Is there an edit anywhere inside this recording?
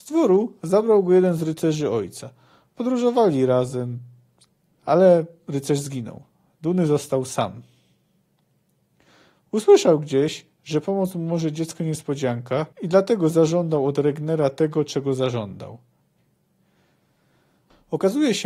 yes; 2 cuts; at 4.7 s, 12.7 s

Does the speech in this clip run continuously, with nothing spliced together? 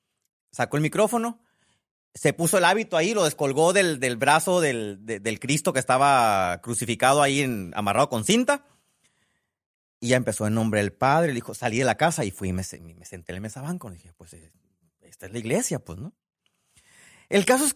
yes; 0 cuts

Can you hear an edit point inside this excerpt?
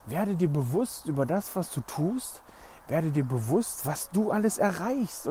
no; 0 cuts

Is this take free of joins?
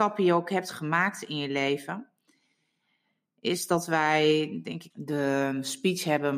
no; 1 cut; at 4.9 s

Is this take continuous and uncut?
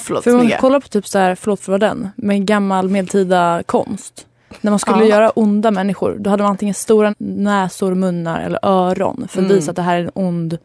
no; 1 cut; at 7.1 s

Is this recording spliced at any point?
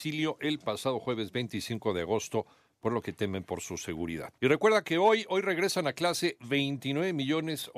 yes; 1 cut; at 4.4 s

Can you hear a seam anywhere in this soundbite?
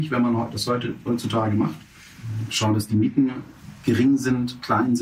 no; 0 cuts

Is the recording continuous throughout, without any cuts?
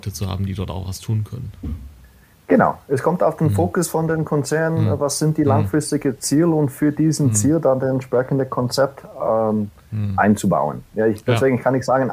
yes; 0 cuts

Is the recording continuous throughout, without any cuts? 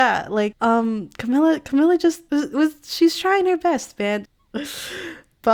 no; 1 cut; at 4.3 s

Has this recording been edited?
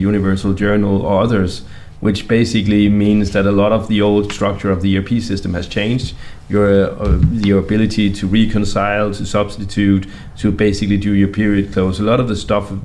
yes; 1 cut; at 6.4 s

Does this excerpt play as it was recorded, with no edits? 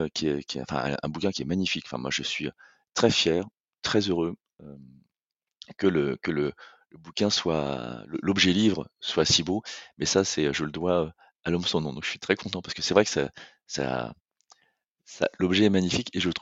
yes; 0 cuts

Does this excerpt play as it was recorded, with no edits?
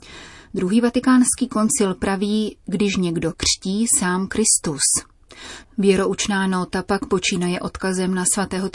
no; 2 cuts; at 3.3 s, 5.6 s

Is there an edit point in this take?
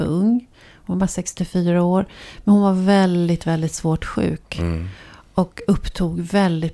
no; 0 cuts

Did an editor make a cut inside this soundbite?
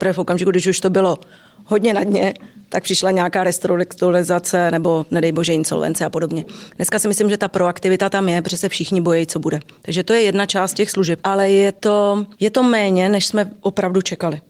yes; 2 cuts; at 11.2 s, 12.3 s

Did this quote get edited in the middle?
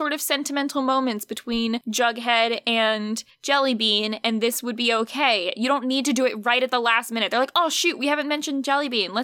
no; 0 cuts

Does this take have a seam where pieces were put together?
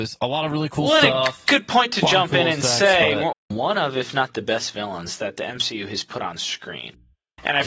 yes; 1 cut; at 3.3 s

